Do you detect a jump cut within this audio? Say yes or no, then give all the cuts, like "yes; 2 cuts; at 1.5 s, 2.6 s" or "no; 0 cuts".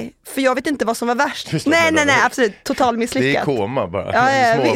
yes; 1 cut; at 1.4 s